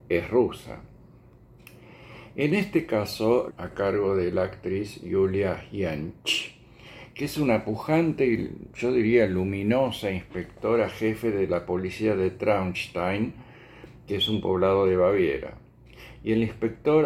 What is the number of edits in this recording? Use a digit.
1